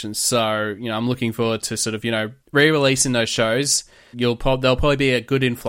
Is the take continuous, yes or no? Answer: no